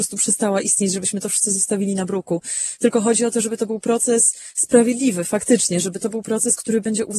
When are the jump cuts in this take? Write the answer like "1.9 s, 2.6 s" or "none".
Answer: none

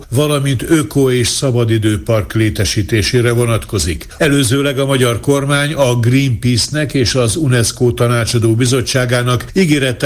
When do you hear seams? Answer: 4.2 s

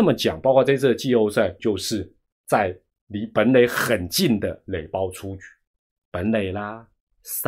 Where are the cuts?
1.6 s

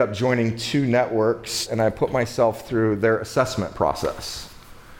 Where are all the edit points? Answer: 1.7 s

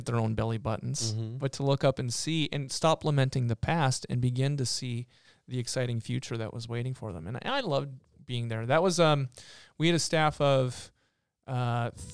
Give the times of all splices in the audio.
none

